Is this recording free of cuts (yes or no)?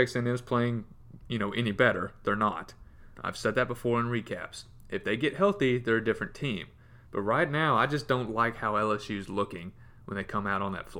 no